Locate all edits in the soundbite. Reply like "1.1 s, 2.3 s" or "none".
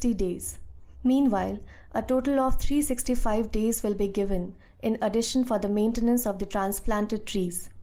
none

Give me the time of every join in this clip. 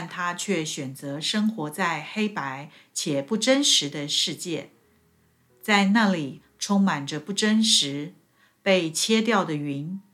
none

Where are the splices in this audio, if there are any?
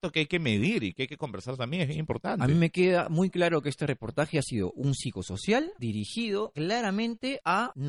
none

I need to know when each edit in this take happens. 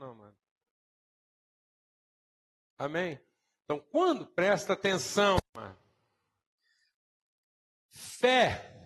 none

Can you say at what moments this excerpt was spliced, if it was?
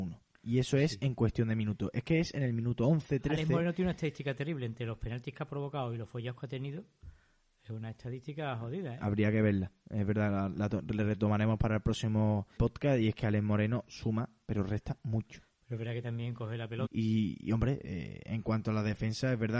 12.6 s, 16.9 s

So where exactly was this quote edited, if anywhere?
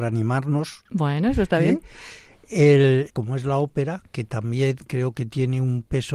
3.1 s

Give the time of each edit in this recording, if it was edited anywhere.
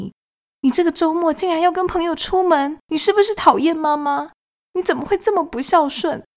2.9 s

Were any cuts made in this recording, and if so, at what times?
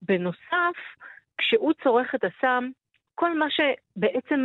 3.1 s

